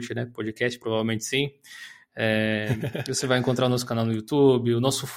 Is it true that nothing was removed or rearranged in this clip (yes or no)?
yes